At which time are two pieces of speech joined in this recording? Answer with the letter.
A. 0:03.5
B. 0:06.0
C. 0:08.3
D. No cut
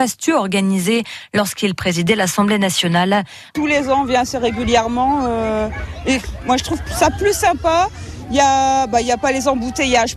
A